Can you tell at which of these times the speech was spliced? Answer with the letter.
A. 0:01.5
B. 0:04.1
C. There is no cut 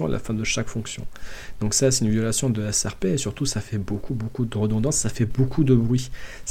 C